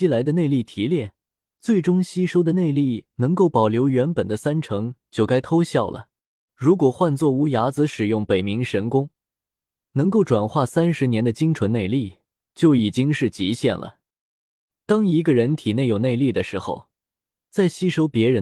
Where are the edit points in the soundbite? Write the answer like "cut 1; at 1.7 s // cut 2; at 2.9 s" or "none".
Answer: cut 1; at 6.5 s